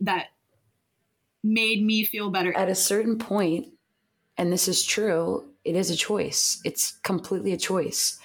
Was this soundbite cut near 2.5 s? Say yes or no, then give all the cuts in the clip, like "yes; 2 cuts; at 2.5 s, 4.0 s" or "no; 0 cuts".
yes; 1 cut; at 2.5 s